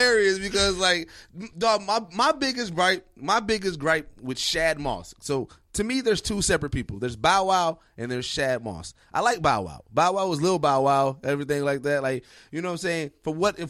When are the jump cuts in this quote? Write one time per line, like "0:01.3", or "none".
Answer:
none